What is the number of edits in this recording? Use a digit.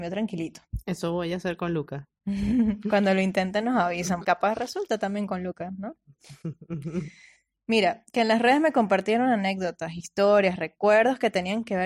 1